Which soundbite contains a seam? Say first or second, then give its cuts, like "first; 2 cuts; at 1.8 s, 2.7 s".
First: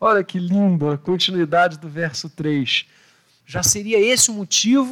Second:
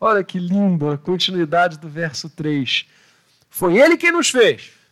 first; 1 cut; at 3.4 s